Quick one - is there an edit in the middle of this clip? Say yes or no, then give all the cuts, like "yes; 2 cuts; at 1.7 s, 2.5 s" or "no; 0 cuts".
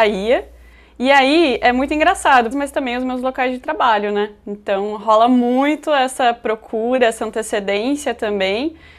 yes; 1 cut; at 2.5 s